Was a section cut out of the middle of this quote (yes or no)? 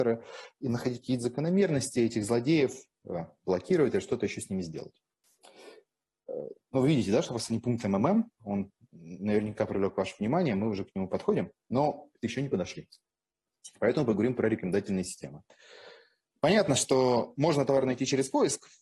no